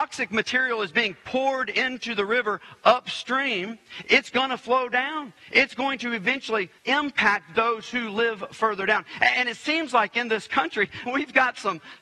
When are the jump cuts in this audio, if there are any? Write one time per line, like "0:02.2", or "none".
0:06.8
0:11.1